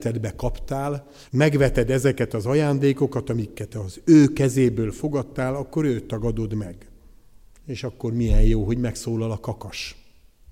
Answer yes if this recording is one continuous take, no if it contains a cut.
no